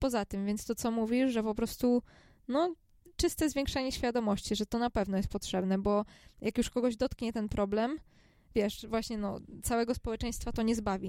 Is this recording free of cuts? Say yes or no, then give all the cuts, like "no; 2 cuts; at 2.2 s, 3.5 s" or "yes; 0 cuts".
yes; 0 cuts